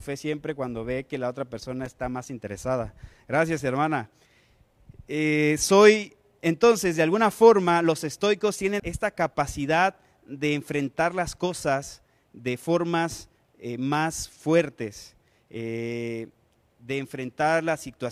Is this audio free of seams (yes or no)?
no